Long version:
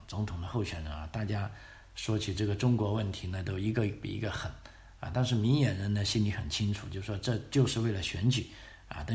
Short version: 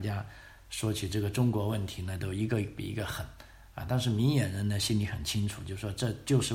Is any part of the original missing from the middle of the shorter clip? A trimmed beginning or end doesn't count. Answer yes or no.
no